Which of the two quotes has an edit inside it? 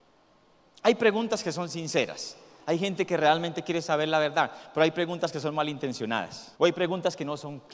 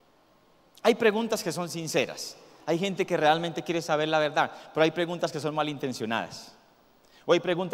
first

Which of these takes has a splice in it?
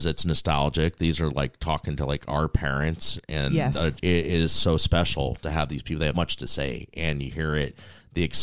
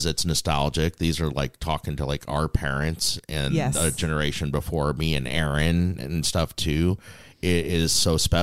first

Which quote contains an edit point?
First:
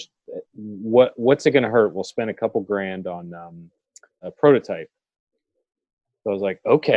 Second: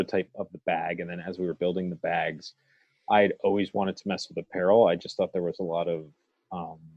first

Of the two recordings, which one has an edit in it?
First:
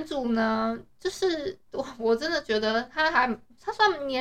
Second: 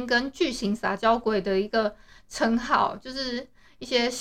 first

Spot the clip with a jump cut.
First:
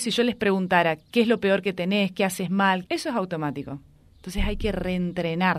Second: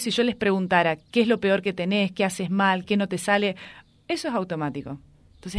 first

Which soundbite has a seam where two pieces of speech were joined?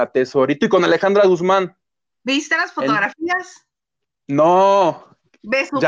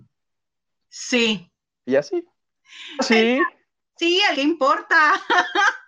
second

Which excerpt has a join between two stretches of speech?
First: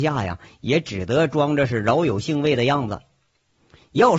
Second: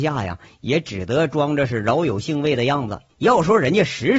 second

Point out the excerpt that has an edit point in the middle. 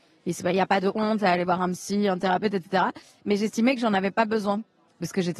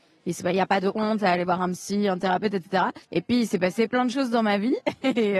second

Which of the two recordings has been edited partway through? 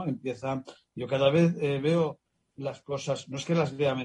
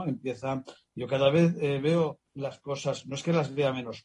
second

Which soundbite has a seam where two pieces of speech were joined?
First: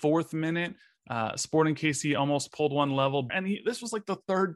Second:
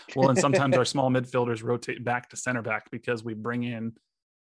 first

